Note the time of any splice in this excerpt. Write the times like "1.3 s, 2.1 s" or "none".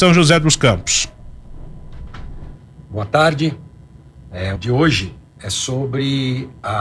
4.6 s

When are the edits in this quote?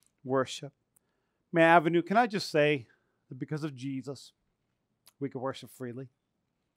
none

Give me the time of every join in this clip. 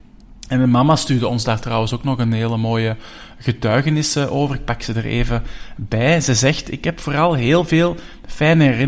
none

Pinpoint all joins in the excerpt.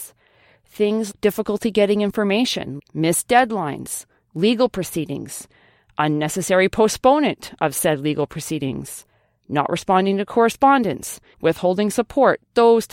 1.1 s, 2.8 s, 11.3 s

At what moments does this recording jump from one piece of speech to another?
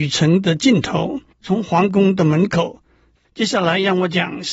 1.3 s, 3.2 s

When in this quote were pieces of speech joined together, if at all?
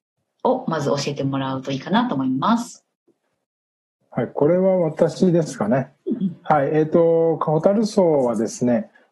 none

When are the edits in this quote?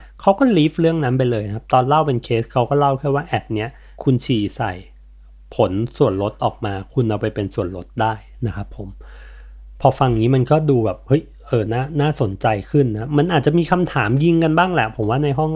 none

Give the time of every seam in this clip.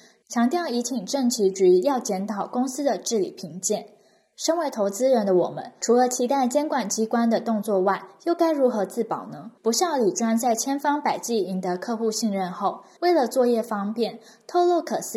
9.6 s, 13.0 s

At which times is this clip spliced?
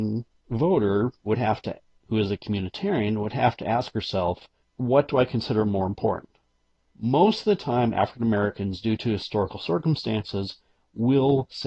4.6 s, 6.8 s

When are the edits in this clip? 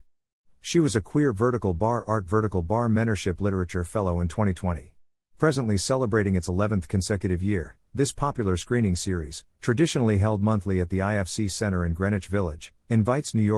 5.3 s

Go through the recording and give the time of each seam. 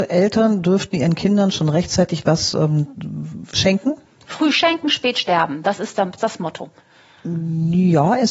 4.0 s, 6.2 s

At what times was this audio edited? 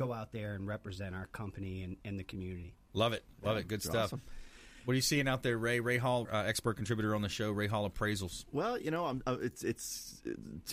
6.3 s

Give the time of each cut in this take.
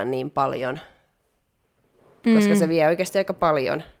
none

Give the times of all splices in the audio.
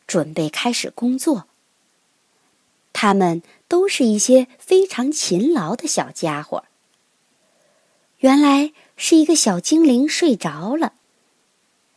8.1 s

